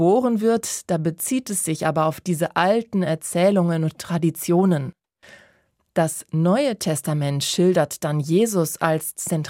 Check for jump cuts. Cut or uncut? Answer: uncut